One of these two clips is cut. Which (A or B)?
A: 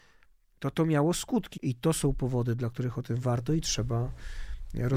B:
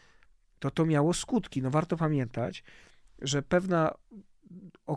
A